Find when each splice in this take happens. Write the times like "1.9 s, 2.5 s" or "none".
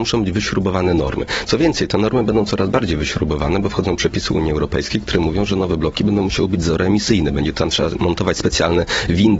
none